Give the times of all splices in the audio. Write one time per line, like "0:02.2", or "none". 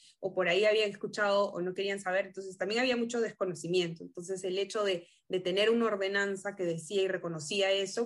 none